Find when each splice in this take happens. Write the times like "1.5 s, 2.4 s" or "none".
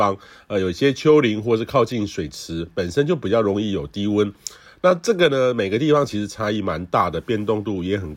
none